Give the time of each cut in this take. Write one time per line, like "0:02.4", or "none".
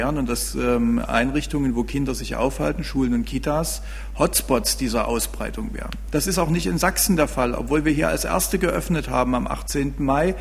0:06.1